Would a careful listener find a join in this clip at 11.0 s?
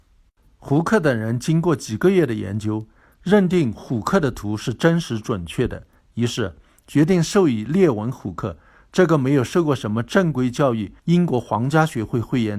yes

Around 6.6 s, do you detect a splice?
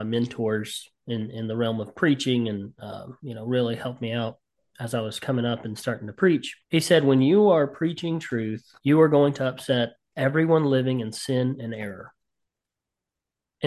yes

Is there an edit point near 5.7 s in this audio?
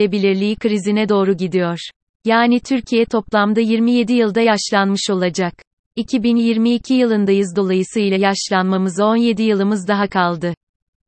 no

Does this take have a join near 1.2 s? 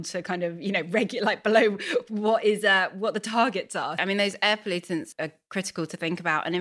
no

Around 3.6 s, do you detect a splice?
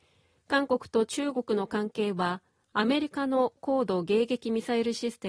yes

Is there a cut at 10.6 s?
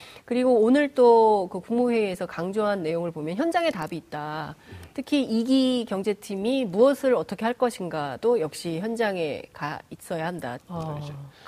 yes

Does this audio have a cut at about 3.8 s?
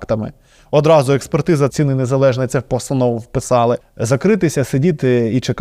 yes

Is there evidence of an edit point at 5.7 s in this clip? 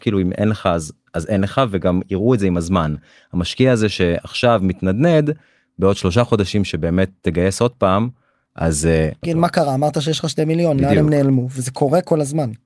no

